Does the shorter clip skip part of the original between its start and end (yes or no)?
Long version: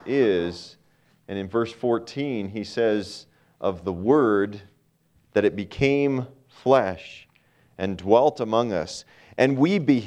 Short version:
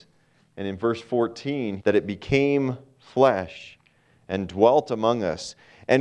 yes